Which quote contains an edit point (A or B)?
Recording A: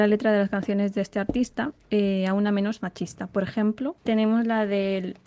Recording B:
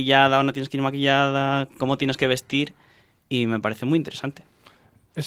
A